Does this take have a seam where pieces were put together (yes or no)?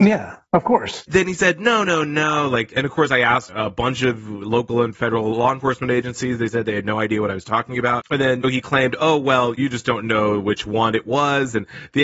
no